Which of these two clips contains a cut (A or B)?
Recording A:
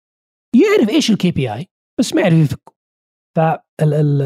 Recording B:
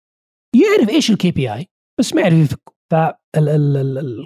B